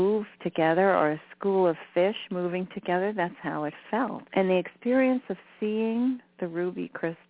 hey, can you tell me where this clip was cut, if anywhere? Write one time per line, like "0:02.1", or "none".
0:04.3